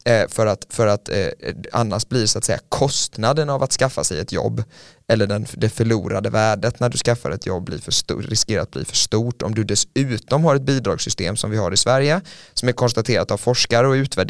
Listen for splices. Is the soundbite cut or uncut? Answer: uncut